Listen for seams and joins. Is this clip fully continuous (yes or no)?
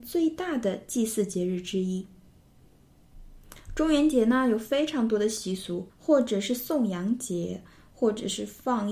no